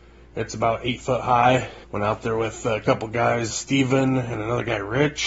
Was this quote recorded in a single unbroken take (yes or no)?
no